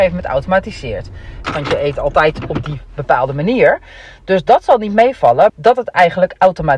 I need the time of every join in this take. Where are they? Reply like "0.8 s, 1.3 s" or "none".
1.4 s, 5.5 s